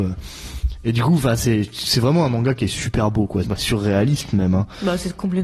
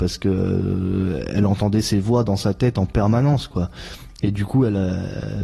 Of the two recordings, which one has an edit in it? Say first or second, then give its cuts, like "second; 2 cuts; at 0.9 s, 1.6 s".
first; 1 cut; at 3.4 s